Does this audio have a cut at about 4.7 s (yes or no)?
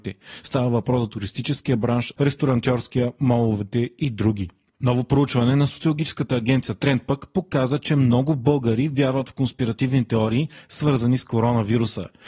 no